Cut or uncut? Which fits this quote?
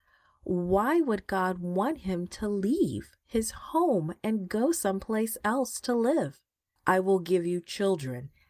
cut